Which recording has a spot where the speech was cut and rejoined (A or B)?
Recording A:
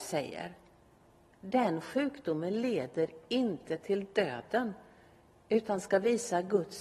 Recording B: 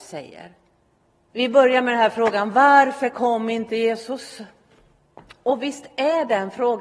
B